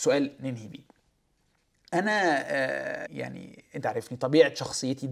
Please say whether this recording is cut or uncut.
cut